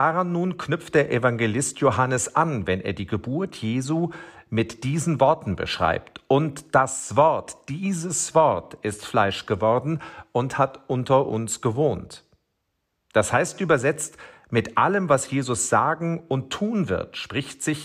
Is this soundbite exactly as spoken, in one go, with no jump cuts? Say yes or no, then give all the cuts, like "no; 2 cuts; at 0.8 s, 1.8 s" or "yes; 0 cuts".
yes; 0 cuts